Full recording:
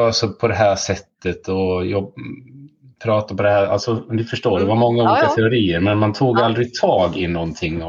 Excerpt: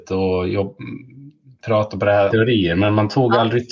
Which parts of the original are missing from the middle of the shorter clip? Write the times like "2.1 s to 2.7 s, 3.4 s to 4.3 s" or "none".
3.7 s to 5.3 s